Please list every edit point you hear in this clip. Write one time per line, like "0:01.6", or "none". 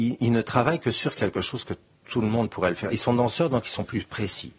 none